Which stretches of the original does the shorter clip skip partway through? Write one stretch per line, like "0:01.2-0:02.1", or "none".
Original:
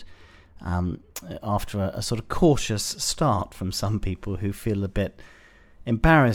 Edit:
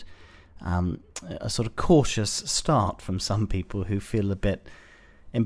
0:01.4-0:01.9